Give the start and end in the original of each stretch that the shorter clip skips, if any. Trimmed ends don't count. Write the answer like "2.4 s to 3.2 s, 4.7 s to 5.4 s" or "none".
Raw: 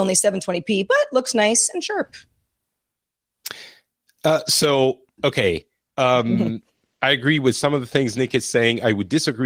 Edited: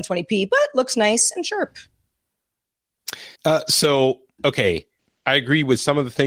3.7 s to 4.1 s, 5.8 s to 6.7 s